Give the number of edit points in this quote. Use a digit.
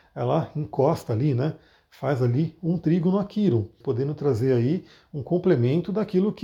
1